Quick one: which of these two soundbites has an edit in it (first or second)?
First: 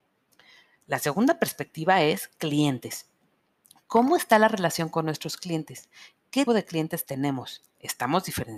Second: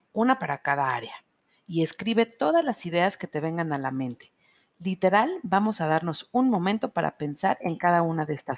first